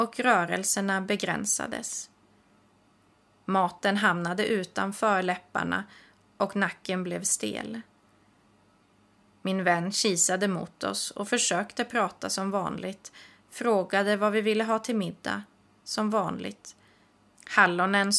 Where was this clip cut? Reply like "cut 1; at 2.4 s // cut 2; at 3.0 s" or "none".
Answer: cut 1; at 17.3 s